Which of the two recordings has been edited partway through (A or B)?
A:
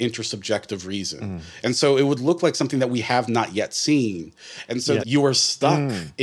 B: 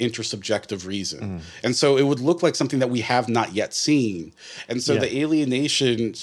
A